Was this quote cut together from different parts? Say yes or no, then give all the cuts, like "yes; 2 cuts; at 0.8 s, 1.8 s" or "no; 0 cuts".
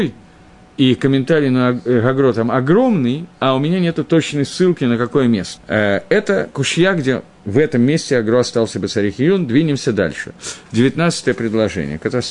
yes; 1 cut; at 5.6 s